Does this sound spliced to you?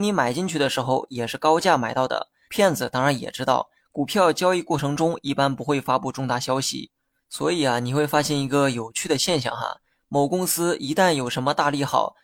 yes; 2 cuts; at 2.5 s, 3.8 s

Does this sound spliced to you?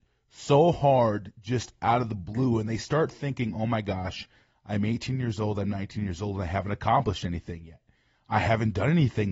no; 0 cuts

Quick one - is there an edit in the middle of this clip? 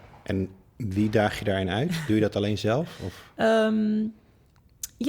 no; 0 cuts

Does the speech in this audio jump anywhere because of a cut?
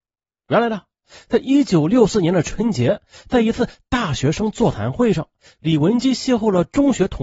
no; 0 cuts

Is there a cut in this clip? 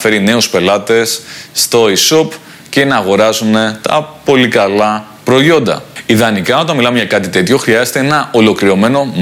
no; 0 cuts

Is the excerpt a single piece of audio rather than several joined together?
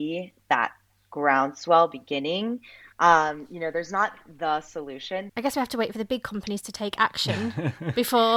no; 2 cuts; at 2.9 s, 5.3 s

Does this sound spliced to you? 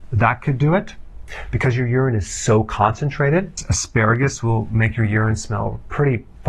no; 0 cuts

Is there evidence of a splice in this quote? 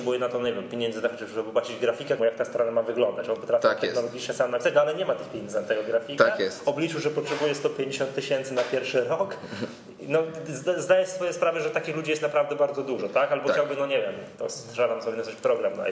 yes; 1 cut; at 2.2 s

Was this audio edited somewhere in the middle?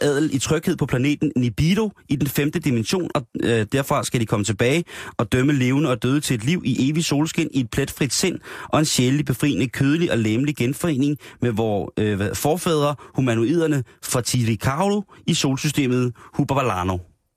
yes; 1 cut; at 3.1 s

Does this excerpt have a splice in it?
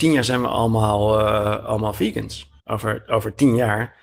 yes; 1 cut; at 2.6 s

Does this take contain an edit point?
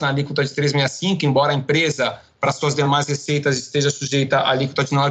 no; 0 cuts

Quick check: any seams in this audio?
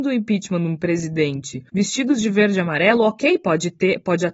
no; 0 cuts

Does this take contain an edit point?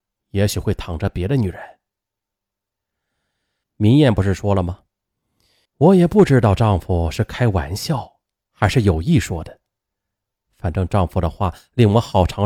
yes; 2 cuts; at 3.6 s, 5.7 s

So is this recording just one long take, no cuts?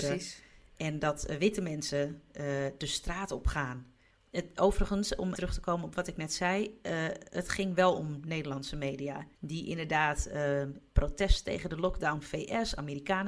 no; 2 cuts; at 5.3 s, 9.3 s

